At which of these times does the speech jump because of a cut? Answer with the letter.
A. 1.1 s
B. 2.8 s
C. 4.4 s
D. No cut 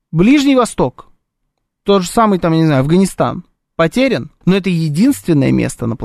C